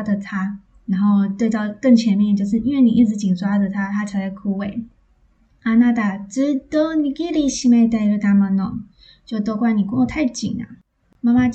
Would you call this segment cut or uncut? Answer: uncut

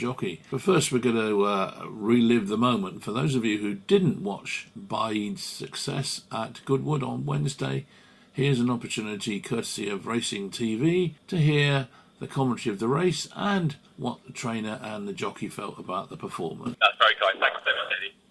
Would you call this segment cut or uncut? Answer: cut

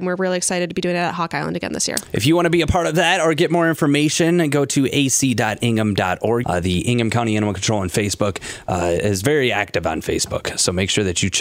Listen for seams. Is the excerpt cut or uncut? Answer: cut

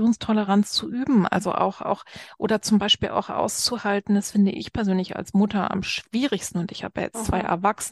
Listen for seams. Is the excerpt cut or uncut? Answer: uncut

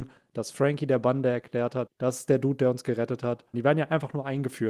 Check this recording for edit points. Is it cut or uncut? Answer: cut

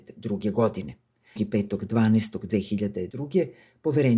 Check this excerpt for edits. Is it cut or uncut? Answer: cut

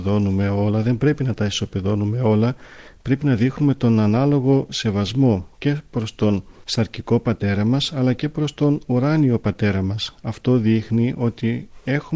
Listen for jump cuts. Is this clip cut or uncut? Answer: uncut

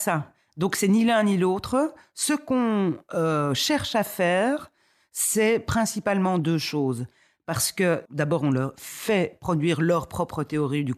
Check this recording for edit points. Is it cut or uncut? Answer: cut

